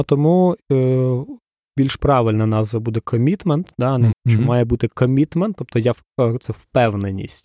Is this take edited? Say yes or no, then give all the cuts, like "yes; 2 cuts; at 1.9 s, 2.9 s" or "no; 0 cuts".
yes; 1 cut; at 4.1 s